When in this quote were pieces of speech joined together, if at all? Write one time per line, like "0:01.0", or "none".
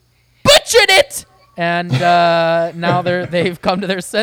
none